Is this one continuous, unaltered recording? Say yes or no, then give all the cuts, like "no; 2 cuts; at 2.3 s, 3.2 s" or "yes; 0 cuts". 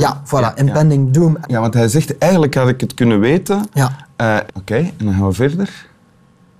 no; 2 cuts; at 1.4 s, 4.5 s